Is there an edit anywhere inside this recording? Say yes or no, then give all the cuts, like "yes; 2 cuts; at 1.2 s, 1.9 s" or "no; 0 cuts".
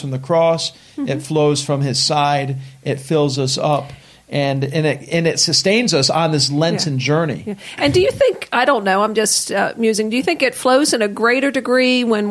no; 0 cuts